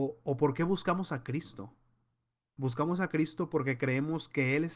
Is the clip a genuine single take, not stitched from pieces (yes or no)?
yes